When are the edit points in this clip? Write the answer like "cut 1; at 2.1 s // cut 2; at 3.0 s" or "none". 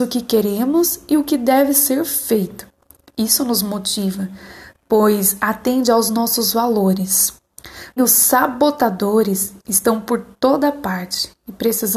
cut 1; at 8.0 s